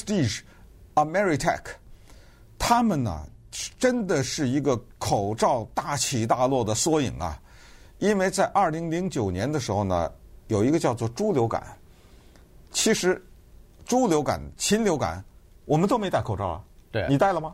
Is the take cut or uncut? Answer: uncut